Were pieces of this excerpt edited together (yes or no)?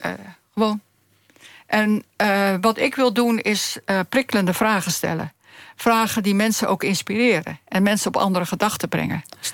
no